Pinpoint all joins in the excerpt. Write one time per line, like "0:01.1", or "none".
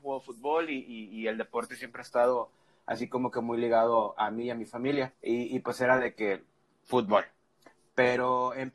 0:05.1